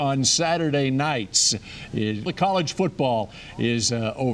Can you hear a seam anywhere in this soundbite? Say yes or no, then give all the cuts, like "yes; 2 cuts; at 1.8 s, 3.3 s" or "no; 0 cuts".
yes; 1 cut; at 2.3 s